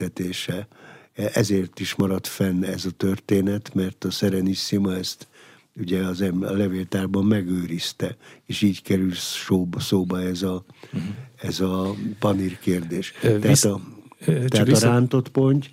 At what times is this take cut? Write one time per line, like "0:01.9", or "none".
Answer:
none